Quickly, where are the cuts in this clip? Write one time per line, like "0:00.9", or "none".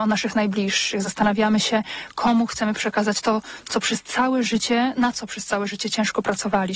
0:04.9